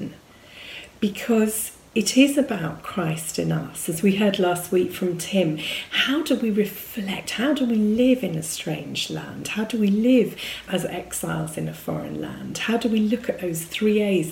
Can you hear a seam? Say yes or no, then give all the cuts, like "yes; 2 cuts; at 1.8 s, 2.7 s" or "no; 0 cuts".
no; 0 cuts